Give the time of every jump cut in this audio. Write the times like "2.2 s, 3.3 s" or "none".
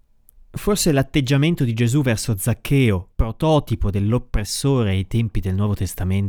3.1 s